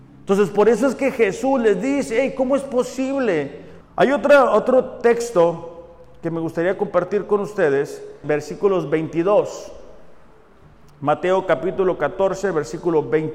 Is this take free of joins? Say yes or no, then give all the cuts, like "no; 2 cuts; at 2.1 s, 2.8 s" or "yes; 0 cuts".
no; 2 cuts; at 3.8 s, 8.2 s